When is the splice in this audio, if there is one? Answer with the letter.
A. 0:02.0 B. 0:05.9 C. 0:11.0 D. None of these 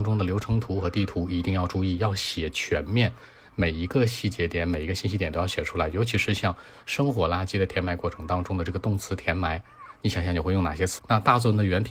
C